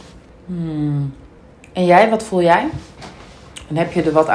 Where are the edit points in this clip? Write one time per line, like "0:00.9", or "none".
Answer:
0:01.5